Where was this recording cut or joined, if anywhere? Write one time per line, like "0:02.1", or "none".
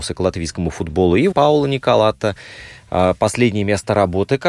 0:01.3